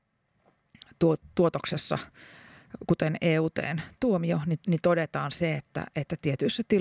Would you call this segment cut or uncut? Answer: uncut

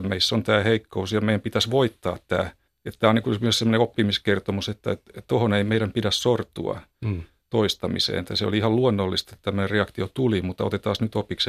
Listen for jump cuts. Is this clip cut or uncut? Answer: uncut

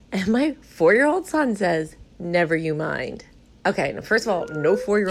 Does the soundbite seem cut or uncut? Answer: uncut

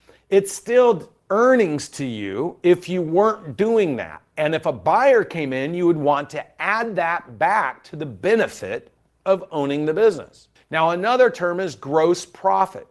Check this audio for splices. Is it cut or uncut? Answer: uncut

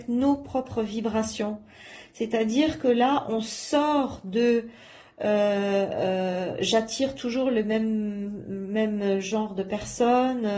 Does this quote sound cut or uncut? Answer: uncut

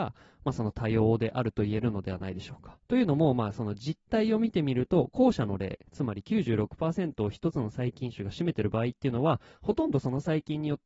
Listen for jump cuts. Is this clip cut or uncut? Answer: cut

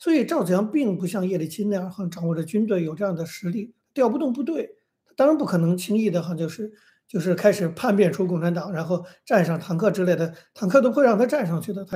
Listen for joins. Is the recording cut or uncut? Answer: uncut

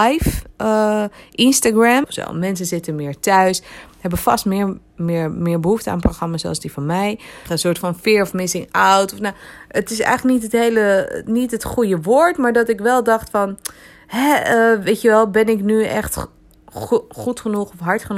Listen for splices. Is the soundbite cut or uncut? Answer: cut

